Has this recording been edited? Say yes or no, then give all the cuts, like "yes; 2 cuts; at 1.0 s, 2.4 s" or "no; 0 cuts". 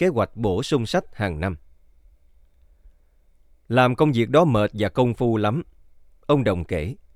no; 0 cuts